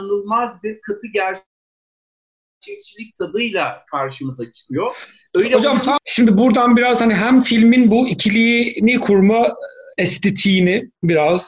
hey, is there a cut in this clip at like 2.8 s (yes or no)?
no